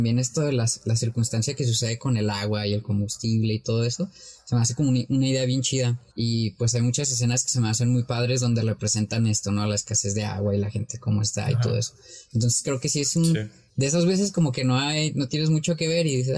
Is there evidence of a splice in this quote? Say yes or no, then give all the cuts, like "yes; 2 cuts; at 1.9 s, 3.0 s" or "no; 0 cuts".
yes; 2 cuts; at 6.1 s, 13.7 s